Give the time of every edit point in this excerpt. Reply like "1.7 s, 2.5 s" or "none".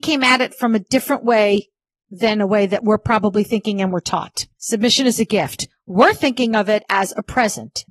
4.6 s